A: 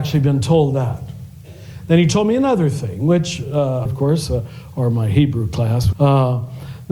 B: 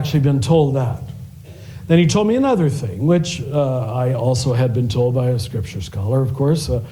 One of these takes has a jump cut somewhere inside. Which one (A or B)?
A